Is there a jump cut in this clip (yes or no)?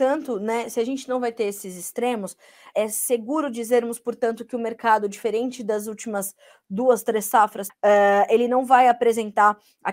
yes